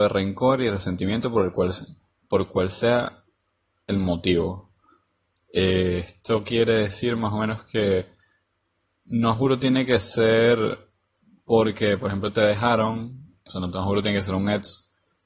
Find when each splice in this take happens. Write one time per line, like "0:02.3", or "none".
0:13.5